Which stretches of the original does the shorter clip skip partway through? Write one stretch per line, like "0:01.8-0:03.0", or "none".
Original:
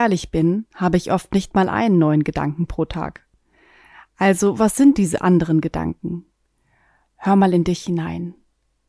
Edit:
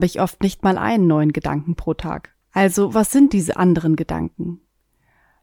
0:03.3-0:04.1